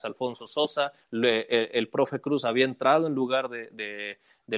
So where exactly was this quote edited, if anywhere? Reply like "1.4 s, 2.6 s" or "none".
1.0 s, 2.4 s